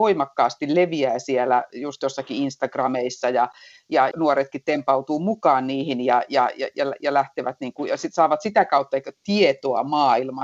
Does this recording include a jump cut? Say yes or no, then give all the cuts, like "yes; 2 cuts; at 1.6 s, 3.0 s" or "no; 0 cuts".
yes; 1 cut; at 4.1 s